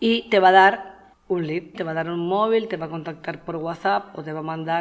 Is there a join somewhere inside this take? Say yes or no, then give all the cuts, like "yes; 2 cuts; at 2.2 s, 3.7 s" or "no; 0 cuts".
yes; 1 cut; at 1.7 s